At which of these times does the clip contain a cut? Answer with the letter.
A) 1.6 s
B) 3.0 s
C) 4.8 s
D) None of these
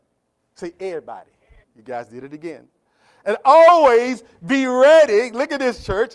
A